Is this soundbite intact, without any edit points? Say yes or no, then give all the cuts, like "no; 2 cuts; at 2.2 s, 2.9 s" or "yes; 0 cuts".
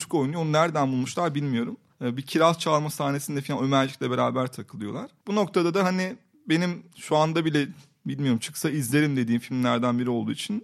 yes; 0 cuts